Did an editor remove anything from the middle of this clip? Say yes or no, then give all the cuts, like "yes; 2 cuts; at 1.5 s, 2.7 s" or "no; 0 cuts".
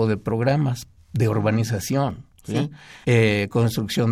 yes; 1 cut; at 3.0 s